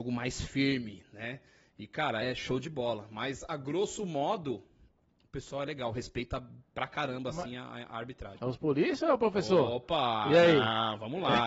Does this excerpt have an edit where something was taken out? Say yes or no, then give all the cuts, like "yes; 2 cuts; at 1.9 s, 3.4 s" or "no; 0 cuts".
yes; 2 cuts; at 2.2 s, 8.4 s